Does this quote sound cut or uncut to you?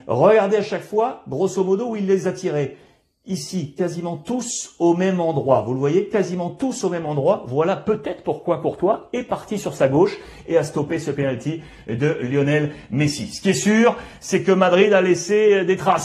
uncut